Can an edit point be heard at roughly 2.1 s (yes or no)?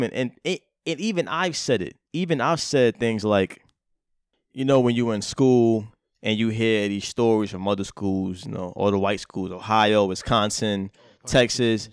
yes